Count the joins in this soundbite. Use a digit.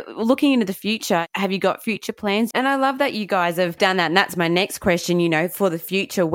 1